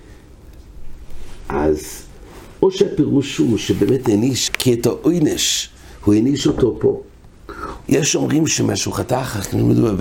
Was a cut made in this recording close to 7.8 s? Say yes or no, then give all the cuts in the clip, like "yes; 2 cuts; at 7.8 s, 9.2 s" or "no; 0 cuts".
yes; 2 cuts; at 4.5 s, 7.8 s